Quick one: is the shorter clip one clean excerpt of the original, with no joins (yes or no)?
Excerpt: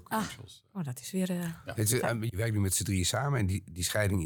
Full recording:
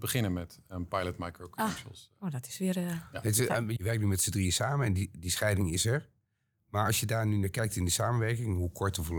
yes